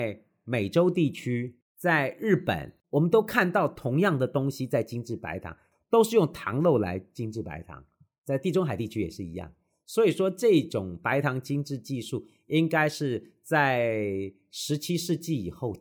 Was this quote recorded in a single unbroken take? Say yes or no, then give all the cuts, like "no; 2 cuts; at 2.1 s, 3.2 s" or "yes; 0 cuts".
no; 1 cut; at 2.8 s